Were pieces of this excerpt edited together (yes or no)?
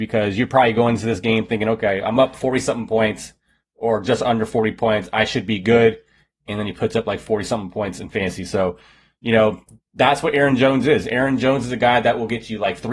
no